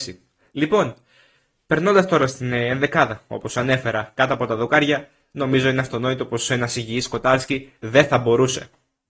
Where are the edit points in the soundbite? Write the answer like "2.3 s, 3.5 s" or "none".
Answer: none